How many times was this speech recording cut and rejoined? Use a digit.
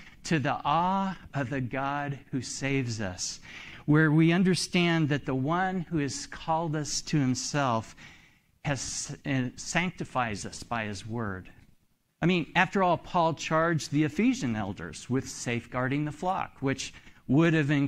1